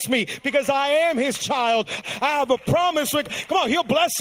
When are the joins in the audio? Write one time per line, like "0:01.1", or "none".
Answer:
0:02.0